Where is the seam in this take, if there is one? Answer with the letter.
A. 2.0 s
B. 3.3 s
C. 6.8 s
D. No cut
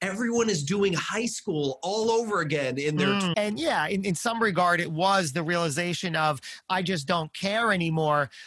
B